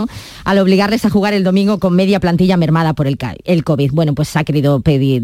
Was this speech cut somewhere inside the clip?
no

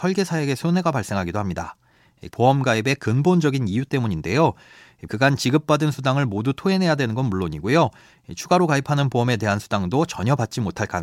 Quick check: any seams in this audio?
yes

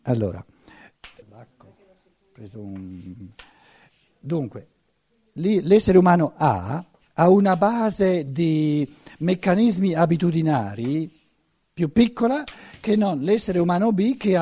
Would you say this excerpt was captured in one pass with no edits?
no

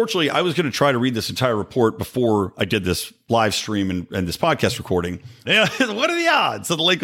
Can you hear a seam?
yes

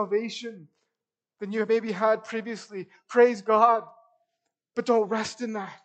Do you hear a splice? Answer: no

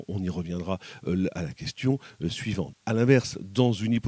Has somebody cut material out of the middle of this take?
yes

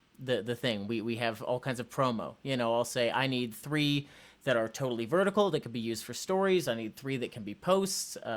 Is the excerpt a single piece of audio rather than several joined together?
yes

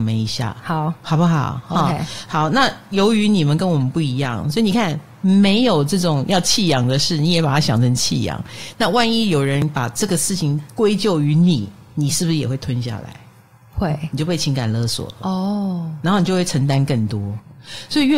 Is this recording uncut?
yes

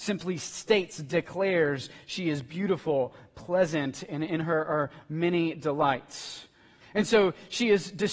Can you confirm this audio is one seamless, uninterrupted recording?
no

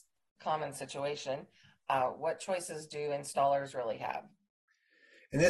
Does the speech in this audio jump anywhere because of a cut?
no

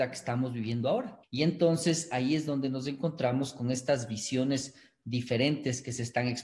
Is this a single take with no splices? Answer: no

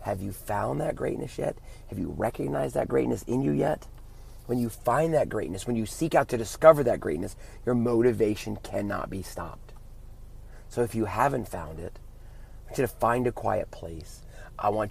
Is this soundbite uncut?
yes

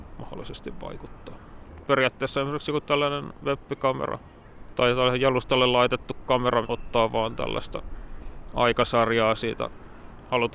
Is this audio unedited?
no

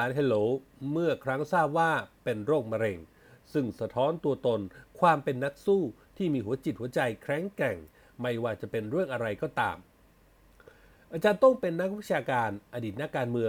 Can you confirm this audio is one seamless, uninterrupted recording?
yes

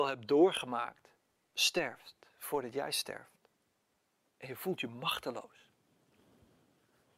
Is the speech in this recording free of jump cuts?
no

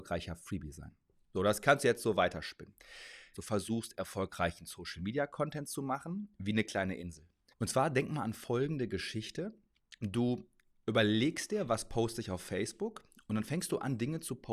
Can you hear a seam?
yes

